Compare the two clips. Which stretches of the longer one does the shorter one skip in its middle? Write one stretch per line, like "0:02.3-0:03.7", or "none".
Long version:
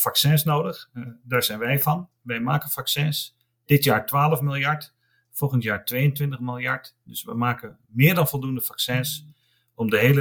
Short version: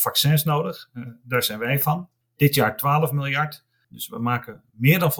0:02.2-0:03.5
0:05.1-0:07.0